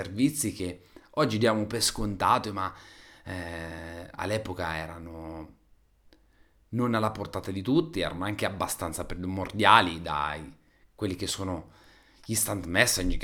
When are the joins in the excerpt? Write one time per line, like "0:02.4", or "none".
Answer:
none

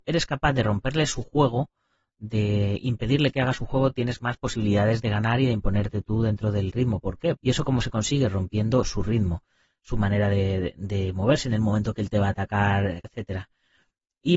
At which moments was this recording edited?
0:07.4
0:13.0

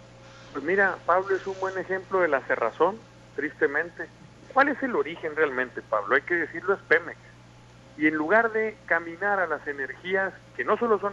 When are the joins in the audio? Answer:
0:07.8

